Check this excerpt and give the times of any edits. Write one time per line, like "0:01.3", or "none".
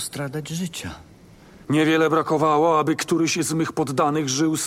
0:01.6